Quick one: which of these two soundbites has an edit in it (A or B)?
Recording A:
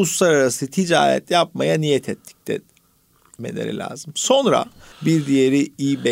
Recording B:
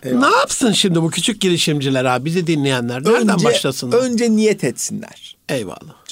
A